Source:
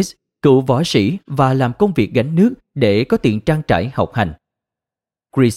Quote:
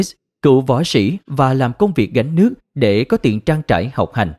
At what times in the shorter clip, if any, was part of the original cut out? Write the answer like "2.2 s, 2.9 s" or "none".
none